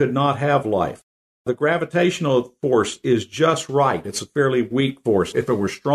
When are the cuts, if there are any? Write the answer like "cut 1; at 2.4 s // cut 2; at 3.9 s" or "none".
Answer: none